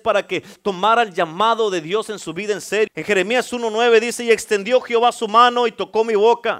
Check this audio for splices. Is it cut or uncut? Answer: cut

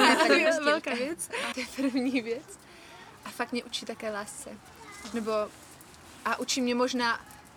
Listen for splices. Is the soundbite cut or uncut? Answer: cut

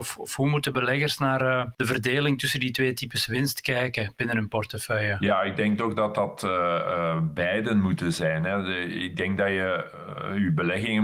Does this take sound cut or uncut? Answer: uncut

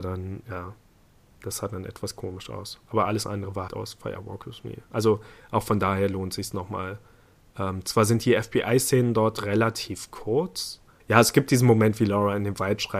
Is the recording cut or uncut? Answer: cut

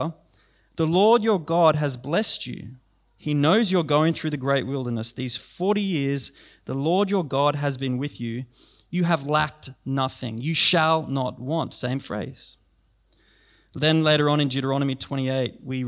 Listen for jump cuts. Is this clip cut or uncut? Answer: uncut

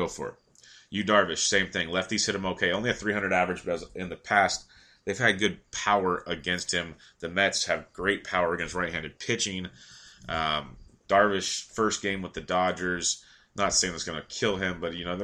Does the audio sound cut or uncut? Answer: uncut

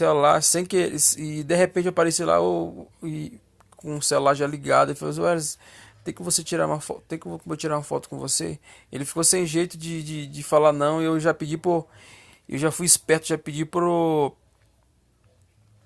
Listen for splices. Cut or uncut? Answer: uncut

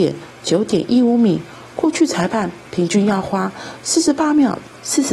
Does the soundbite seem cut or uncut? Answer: uncut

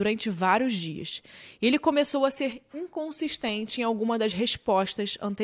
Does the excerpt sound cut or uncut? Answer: uncut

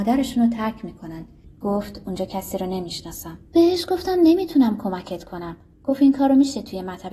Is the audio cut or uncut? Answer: cut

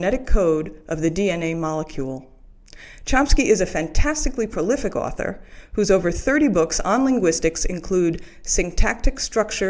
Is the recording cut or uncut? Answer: uncut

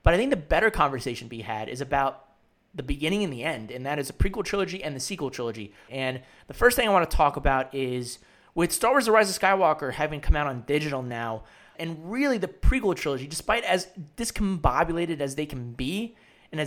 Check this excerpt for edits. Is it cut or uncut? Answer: cut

